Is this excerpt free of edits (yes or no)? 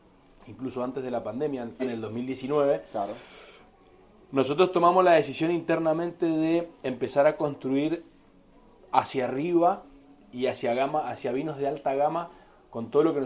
no